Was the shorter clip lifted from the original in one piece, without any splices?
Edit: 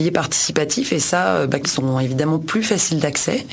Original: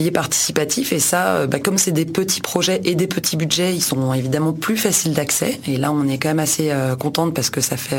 no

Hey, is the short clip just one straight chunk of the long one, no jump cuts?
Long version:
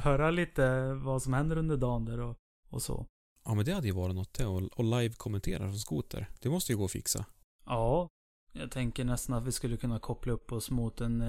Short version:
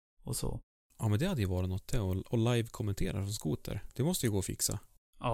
yes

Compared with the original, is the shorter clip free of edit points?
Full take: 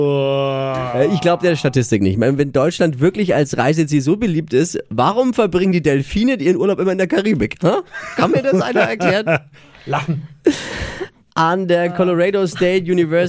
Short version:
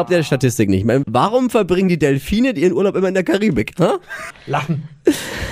no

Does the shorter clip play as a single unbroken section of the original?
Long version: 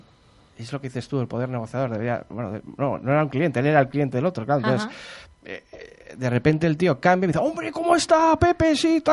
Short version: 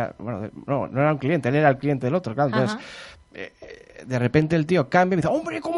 yes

